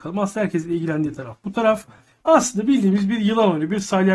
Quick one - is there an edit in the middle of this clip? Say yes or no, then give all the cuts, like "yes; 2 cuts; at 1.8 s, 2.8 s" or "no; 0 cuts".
no; 0 cuts